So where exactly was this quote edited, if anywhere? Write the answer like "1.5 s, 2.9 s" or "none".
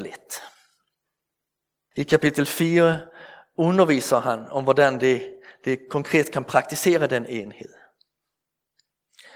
1.9 s